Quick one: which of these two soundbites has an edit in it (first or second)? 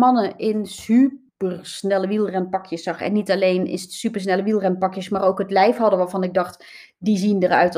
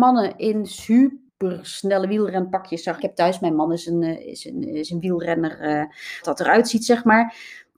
second